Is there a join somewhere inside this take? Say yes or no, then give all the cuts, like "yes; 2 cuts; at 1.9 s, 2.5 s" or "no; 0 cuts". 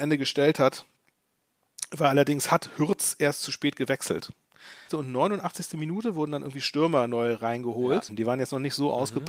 yes; 2 cuts; at 4.9 s, 8.1 s